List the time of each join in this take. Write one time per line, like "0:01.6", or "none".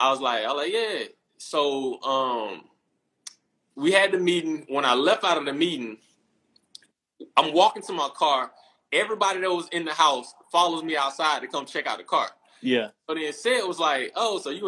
none

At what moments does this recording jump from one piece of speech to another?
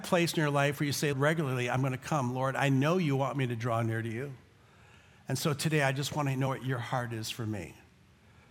0:01.1

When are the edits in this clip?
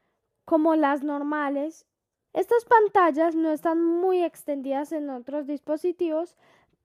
0:02.3

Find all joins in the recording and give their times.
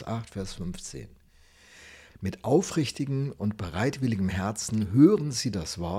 0:02.1

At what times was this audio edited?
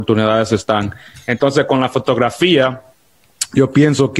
0:01.1

